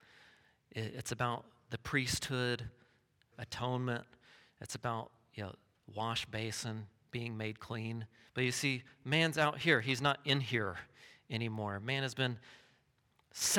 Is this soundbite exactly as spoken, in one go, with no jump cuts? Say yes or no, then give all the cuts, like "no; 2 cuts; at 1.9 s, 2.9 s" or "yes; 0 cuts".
no; 3 cuts; at 3.3 s, 5.7 s, 8.3 s